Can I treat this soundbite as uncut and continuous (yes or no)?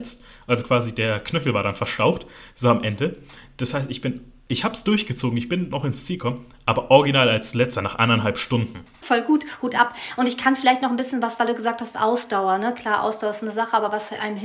no